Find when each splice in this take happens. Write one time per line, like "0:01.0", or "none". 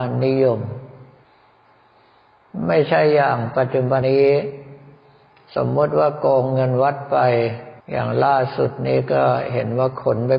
0:04.0
0:07.8